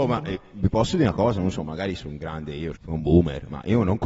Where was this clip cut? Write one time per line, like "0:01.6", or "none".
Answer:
0:02.8